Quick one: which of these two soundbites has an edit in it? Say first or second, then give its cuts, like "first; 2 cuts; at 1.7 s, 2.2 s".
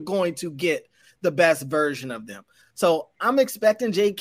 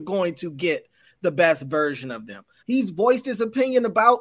second; 1 cut; at 2.6 s